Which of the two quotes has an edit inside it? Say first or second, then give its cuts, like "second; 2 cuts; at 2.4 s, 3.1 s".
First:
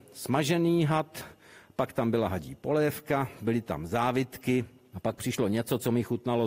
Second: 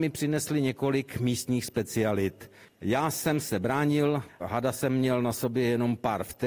second; 2 cuts; at 2.6 s, 4.3 s